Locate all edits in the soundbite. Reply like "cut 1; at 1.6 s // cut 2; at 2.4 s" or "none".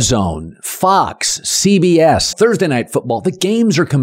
cut 1; at 2.3 s